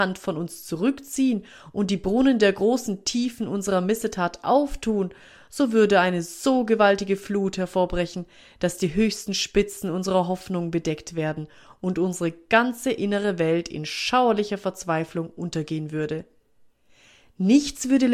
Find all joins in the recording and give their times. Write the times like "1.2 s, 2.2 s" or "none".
none